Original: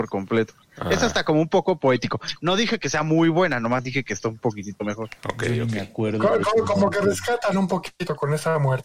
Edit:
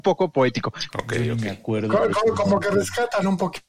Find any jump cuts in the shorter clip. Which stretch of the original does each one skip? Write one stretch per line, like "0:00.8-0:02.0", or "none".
0:02.4-0:05.2